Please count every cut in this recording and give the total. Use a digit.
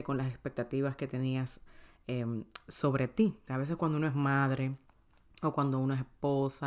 1